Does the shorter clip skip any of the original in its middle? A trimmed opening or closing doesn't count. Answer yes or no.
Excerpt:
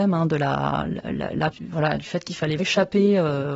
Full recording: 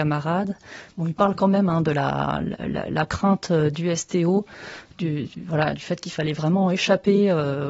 yes